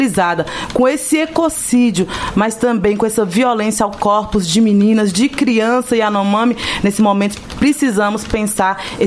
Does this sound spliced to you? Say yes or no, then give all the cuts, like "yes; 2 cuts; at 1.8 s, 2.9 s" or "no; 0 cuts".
no; 0 cuts